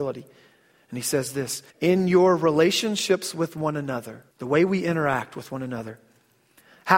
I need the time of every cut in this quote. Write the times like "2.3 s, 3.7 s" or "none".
1.7 s, 4.3 s